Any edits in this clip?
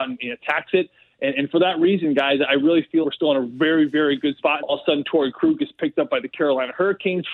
yes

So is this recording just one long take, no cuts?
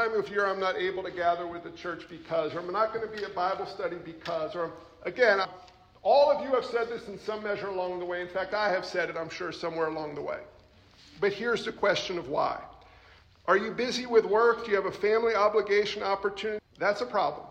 no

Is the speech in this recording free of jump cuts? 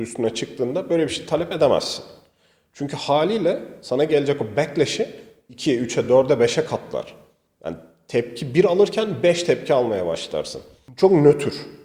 yes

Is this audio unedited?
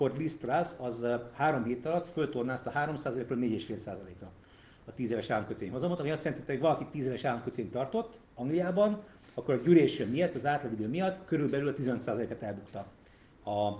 no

